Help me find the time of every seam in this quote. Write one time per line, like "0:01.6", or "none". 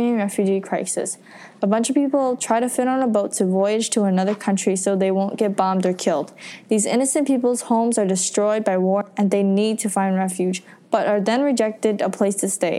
0:01.6

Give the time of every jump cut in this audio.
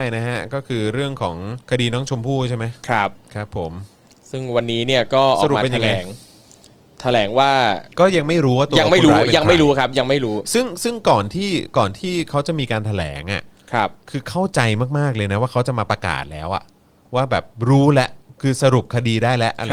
0:01.6
0:07.9

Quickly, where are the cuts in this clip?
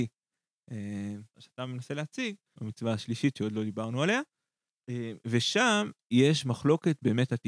0:01.3
0:02.5

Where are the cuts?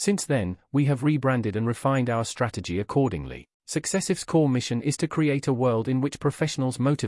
0:03.6

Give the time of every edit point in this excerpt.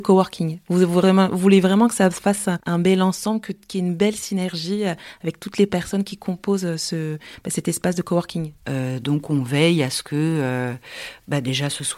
0:08.6

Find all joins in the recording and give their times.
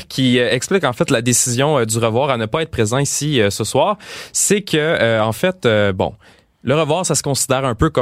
none

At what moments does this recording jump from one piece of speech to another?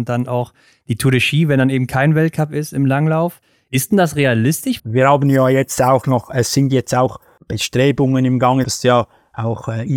0:04.8
0:08.6

